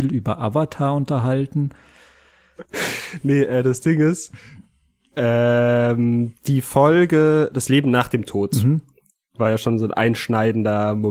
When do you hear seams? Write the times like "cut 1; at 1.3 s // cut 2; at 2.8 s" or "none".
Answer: none